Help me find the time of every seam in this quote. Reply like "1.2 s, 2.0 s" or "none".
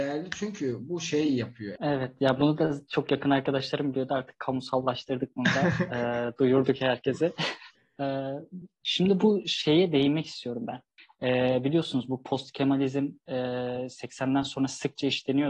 1.8 s